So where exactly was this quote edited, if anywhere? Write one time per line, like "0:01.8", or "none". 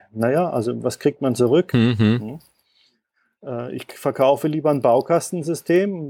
0:01.7